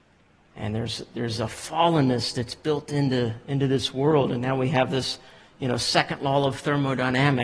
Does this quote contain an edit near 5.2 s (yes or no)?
no